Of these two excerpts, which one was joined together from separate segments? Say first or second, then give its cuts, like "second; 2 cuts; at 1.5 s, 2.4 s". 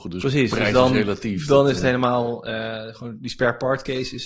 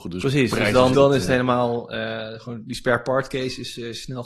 second; 1 cut; at 0.9 s